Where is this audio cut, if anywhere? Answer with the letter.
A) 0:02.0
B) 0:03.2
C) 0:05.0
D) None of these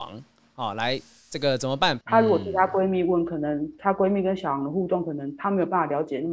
A